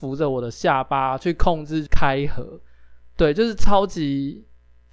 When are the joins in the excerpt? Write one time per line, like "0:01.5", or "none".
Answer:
none